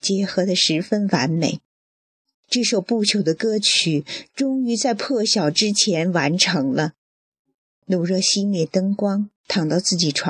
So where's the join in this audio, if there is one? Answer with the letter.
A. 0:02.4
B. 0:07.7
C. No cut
C